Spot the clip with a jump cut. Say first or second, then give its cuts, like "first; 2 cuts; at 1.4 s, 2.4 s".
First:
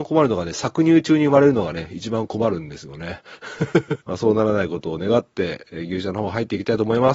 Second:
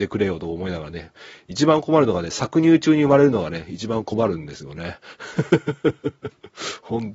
first; 1 cut; at 4.0 s